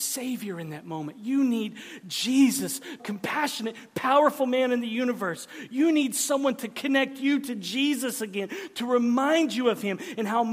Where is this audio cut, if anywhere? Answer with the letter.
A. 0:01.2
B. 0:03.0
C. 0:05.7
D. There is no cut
B